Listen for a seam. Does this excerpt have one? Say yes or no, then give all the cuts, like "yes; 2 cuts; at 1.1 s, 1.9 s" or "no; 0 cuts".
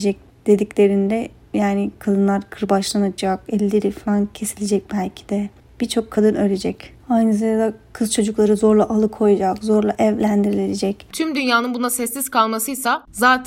yes; 1 cut; at 11.1 s